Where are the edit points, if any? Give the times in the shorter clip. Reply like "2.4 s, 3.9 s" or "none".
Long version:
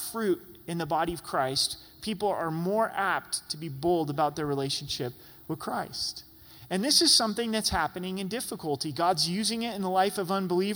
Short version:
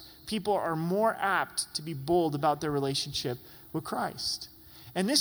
none